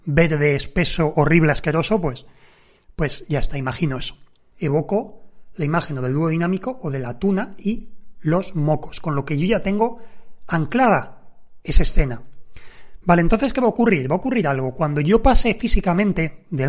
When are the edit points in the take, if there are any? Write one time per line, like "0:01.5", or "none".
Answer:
0:04.5